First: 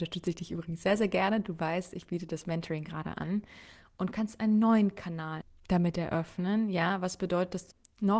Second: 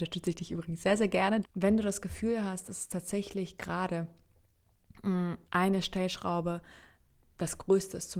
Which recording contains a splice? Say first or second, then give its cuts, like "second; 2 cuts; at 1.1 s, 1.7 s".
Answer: second; 2 cuts; at 1.4 s, 5.5 s